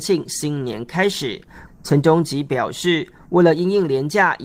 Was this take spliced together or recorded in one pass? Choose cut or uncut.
cut